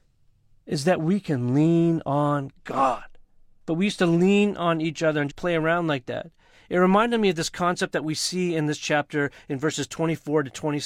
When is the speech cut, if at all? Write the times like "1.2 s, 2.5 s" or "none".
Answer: 3.6 s, 5.3 s